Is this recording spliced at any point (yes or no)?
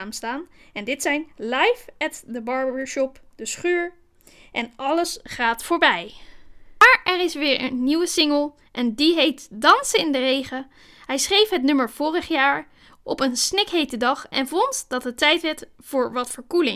no